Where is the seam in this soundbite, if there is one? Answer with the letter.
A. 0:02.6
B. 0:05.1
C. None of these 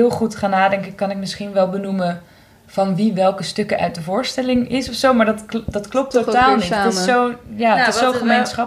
C